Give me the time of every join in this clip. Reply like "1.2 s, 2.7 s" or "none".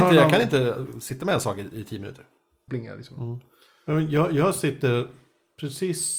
2.7 s